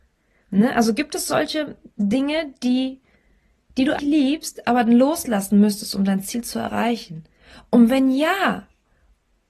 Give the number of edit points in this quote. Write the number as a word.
one